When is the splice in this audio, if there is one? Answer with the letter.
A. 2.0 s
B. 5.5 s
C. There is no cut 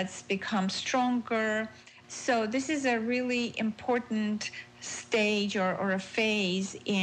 A